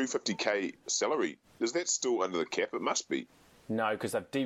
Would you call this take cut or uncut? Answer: uncut